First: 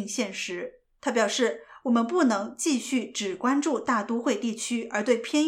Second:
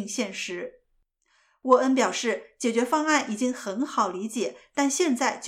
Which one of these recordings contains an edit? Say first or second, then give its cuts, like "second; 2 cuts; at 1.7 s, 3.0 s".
first; 1 cut; at 1.0 s